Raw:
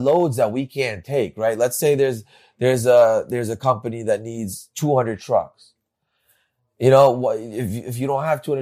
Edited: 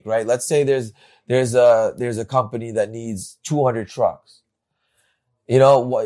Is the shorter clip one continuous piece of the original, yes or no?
yes